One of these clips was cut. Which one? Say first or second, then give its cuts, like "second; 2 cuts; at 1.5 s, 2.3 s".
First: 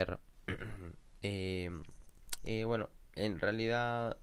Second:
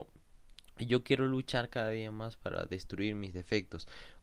first; 1 cut; at 2.4 s